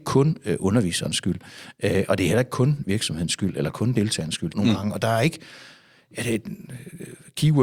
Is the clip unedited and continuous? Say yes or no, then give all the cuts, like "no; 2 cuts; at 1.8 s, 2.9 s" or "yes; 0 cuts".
no; 1 cut; at 4.5 s